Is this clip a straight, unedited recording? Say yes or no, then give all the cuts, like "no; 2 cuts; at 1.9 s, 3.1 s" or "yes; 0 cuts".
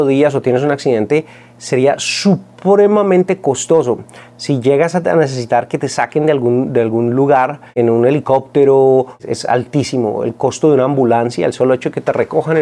yes; 0 cuts